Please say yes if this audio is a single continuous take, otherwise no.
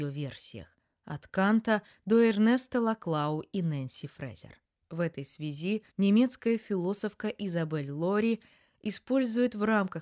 no